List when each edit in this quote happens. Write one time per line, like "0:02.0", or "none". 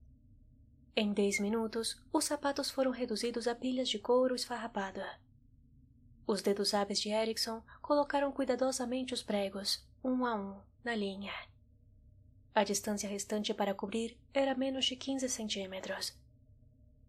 none